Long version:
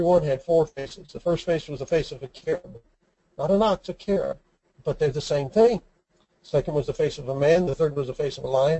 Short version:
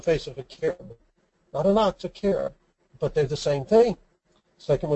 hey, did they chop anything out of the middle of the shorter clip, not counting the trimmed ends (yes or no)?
no